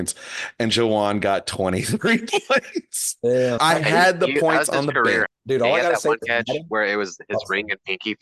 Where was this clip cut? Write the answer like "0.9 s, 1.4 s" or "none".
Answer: 3.6 s, 5.3 s